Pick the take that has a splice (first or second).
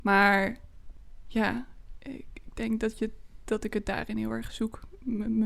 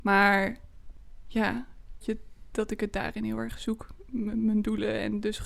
second